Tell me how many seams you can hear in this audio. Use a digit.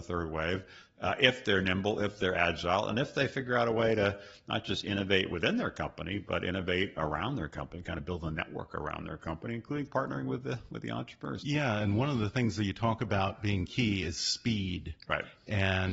1